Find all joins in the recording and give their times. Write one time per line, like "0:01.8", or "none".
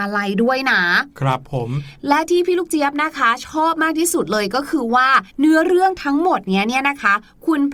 0:05.3